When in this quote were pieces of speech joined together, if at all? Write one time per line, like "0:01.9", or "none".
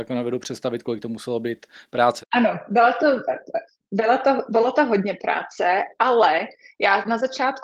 0:02.2